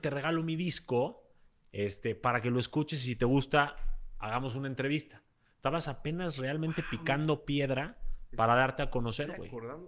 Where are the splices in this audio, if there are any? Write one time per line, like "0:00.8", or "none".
none